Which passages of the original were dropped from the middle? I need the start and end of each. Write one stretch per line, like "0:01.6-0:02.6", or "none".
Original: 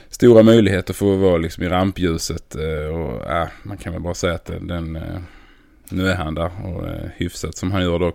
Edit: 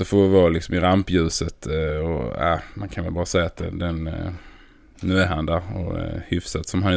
none